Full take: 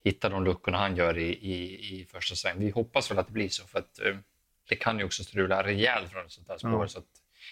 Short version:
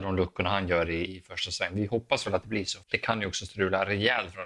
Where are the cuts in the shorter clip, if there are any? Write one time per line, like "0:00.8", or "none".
0:01.1
0:02.8

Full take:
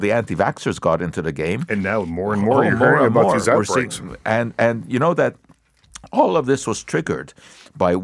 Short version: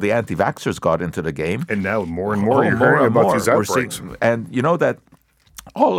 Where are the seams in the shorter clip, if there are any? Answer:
0:04.2

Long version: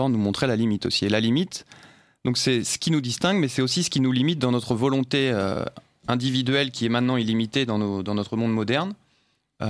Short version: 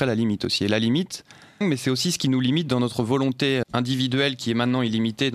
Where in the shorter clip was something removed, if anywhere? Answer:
0:01.6
0:03.6

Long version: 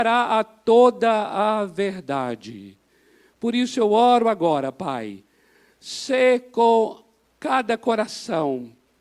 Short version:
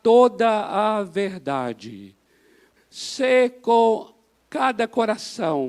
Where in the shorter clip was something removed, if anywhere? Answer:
0:02.8

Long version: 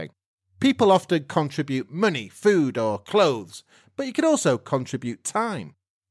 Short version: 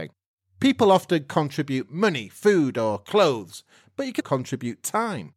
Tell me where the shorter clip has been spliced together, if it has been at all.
0:04.2

